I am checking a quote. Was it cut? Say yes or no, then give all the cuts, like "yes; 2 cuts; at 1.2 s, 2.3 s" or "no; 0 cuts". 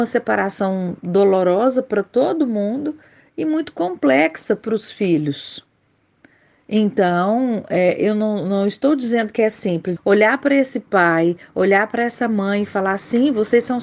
yes; 1 cut; at 10.0 s